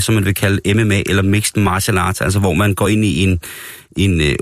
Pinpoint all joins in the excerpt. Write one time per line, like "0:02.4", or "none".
none